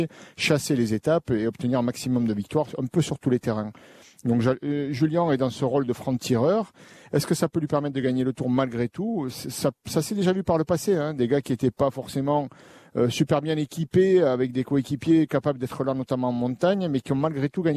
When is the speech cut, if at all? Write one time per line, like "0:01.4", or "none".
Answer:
none